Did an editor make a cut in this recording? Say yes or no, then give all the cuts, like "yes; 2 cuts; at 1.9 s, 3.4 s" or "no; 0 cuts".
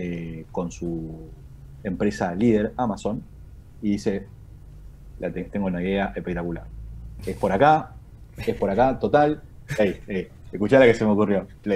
yes; 1 cut; at 9.7 s